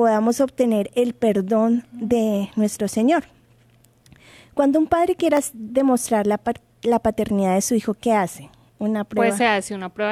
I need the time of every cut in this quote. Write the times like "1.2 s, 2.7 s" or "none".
none